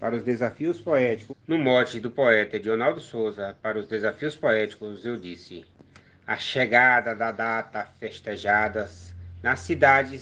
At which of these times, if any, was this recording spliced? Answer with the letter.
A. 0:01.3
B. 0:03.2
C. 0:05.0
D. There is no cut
A